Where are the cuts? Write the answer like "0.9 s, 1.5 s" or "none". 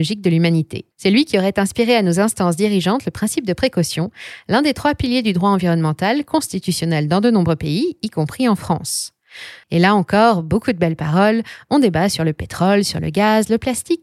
0.9 s, 9.6 s